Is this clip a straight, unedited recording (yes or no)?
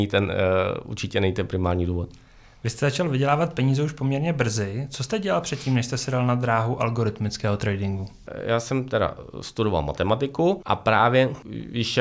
yes